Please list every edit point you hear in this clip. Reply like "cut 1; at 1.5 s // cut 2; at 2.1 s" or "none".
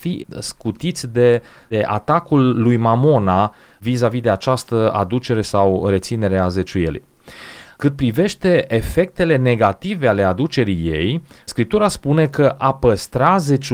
none